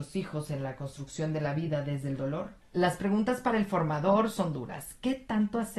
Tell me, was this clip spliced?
yes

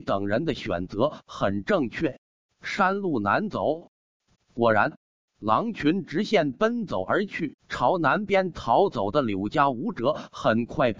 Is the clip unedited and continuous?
no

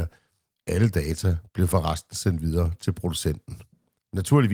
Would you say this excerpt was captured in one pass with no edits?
yes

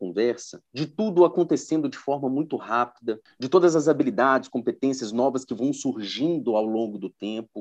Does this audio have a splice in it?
no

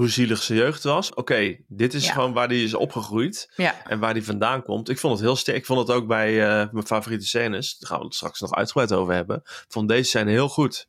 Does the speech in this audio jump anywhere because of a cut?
yes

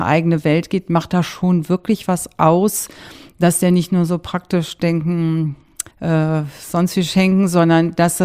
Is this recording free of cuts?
no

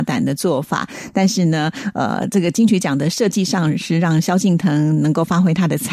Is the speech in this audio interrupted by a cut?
no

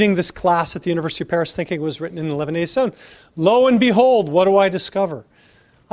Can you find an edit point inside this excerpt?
no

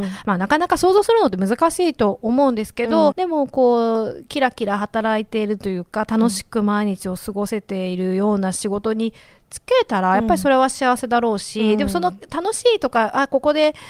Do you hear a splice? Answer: yes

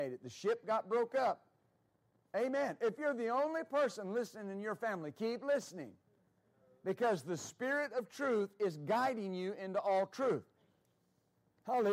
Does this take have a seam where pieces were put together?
yes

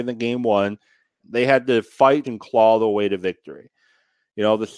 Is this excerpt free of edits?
no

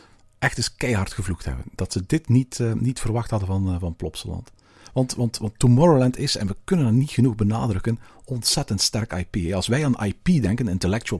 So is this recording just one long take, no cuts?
yes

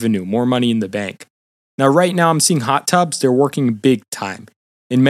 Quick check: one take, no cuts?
yes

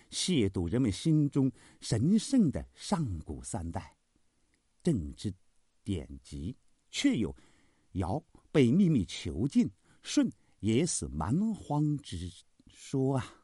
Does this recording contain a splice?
no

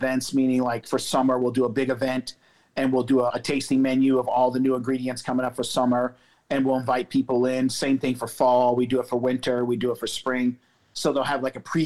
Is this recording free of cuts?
no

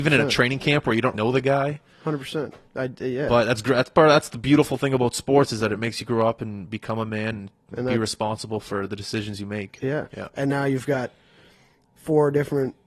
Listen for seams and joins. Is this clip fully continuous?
no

